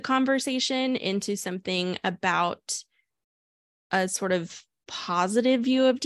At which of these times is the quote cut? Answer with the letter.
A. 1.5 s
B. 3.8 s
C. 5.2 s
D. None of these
D